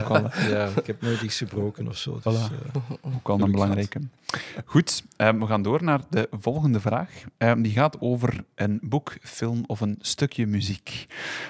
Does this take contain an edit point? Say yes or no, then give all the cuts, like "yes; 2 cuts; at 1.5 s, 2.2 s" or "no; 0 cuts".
no; 0 cuts